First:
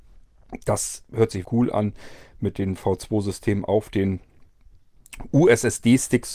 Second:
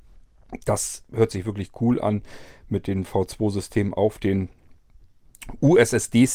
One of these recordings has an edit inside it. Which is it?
first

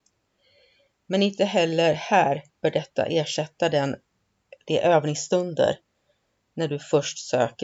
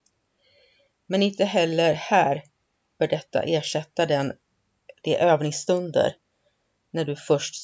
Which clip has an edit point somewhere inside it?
first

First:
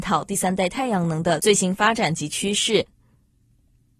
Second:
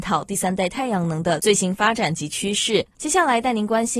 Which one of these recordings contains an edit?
second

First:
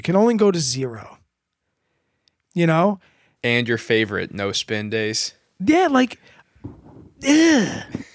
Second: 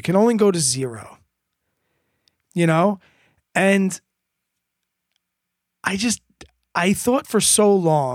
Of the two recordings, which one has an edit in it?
first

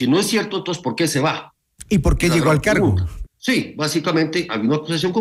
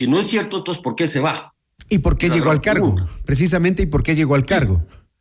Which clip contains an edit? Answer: first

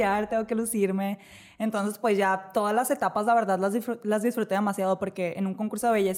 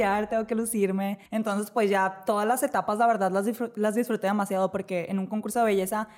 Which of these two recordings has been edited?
second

